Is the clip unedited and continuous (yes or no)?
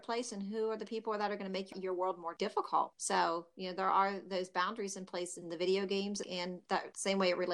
no